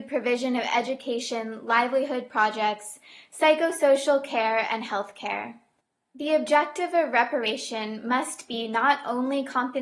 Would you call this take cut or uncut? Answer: uncut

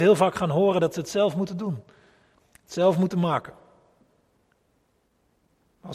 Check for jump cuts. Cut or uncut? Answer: uncut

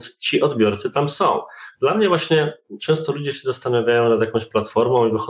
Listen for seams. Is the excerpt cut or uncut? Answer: uncut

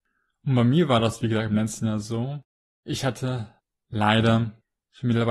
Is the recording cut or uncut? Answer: uncut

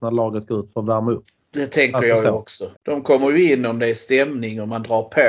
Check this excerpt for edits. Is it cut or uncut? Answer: cut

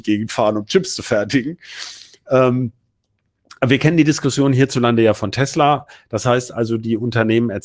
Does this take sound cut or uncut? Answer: uncut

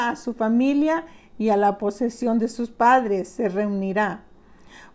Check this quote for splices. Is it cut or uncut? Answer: uncut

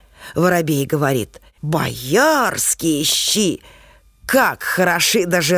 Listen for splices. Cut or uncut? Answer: cut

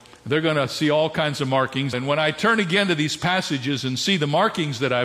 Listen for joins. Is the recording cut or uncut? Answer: cut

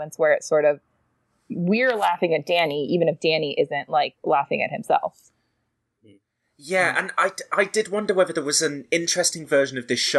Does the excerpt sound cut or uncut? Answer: uncut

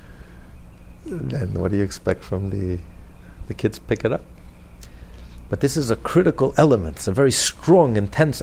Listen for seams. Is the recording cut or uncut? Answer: uncut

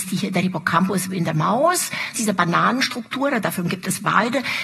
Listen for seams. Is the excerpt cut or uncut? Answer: cut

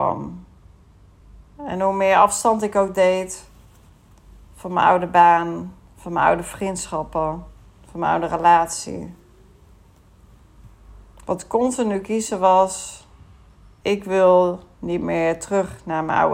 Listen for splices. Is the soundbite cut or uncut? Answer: cut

